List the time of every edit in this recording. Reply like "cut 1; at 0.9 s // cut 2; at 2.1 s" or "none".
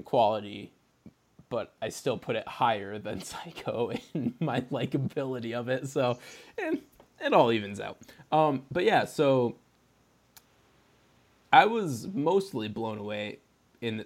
none